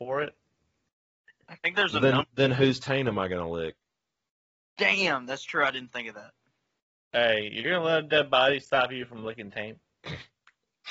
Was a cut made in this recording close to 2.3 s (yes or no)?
no